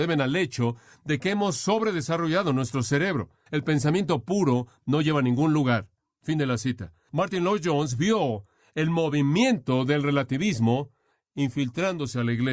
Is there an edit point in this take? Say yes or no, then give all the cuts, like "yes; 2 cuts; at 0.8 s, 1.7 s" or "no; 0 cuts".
yes; 1 cut; at 3.5 s